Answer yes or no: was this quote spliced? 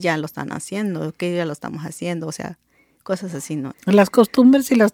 yes